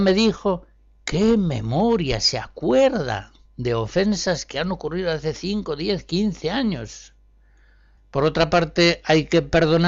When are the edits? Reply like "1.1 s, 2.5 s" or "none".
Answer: 8.0 s